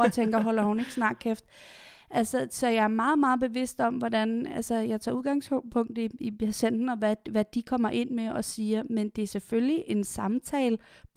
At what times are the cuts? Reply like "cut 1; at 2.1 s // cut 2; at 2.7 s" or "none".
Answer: none